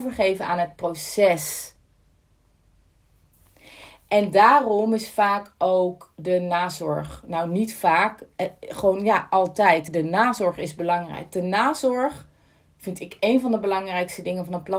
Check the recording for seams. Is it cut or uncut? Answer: uncut